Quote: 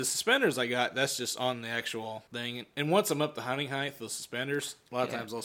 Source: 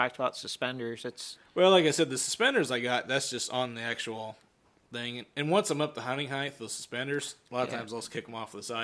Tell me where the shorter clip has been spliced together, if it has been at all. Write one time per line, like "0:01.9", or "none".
0:02.3